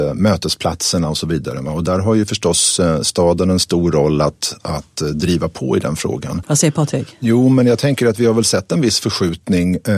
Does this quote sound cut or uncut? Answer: cut